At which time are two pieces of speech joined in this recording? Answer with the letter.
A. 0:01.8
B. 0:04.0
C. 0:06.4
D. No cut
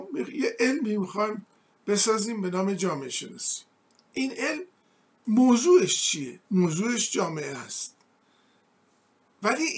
C